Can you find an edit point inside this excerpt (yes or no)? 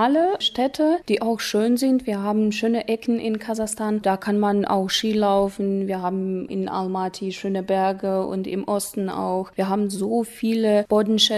no